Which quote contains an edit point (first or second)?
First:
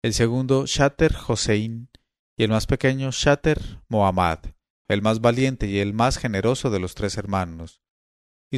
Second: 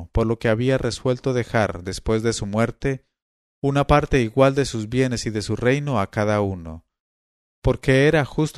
first